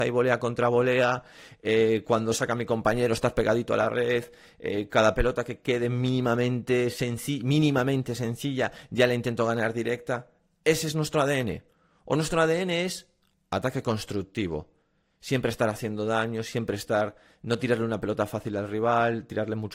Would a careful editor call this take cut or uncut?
uncut